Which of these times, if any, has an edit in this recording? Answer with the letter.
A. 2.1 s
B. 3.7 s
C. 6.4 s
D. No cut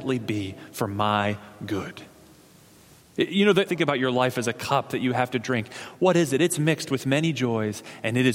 B